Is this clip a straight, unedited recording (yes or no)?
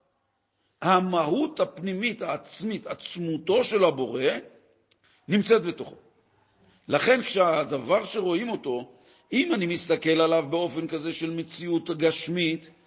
yes